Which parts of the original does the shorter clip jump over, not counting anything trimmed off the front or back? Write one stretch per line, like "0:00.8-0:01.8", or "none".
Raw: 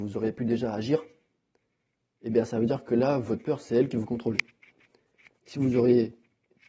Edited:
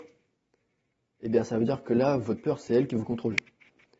none